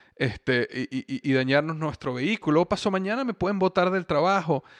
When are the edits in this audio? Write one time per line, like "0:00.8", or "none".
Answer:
0:01.2